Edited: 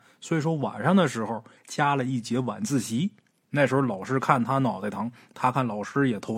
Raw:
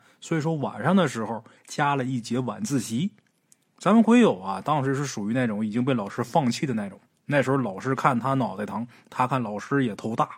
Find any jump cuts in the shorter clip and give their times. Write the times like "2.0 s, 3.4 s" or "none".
3.4 s

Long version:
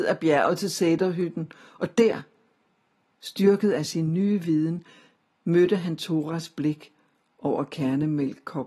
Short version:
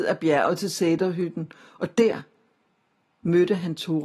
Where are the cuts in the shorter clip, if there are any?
3.1 s

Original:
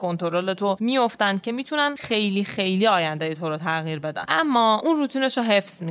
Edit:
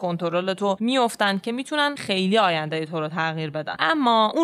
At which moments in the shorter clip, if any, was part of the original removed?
2.0 s

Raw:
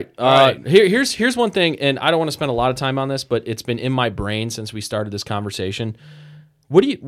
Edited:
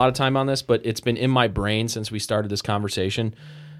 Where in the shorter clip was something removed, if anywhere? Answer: none

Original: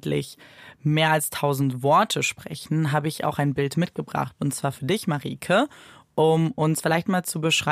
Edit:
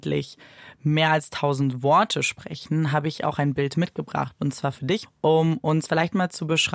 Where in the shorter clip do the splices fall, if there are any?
5.1 s

